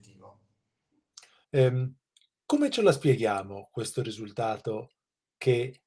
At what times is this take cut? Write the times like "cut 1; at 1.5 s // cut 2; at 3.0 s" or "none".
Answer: cut 1; at 1.4 s